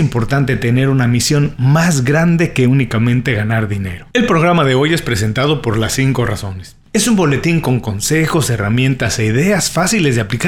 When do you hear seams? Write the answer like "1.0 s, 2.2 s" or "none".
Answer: 4.1 s, 6.9 s